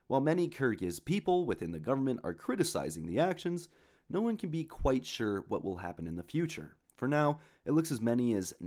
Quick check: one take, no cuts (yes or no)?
yes